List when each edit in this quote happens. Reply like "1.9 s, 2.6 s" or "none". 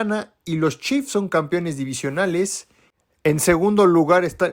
none